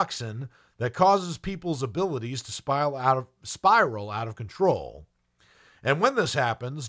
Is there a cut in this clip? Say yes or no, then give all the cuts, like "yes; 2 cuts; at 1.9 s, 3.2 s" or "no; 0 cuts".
no; 0 cuts